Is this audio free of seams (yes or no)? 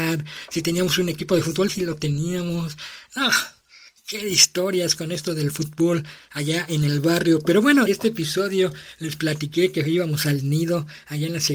no